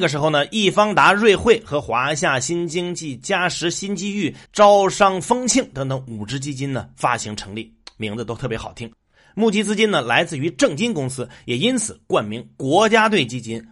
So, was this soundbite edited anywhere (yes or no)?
yes